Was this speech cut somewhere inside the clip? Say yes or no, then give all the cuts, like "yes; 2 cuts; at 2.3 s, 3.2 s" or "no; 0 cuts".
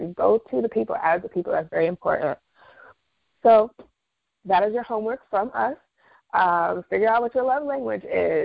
no; 0 cuts